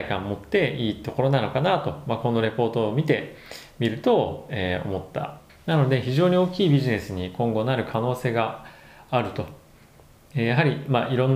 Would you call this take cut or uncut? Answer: cut